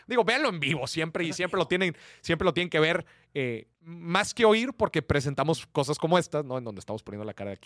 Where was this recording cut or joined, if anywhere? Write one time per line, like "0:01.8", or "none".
0:03.7